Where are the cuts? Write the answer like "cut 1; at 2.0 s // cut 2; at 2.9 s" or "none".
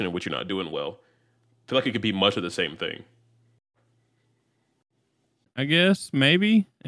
cut 1; at 5.5 s